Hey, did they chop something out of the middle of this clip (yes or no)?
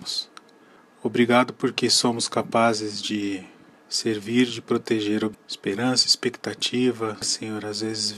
yes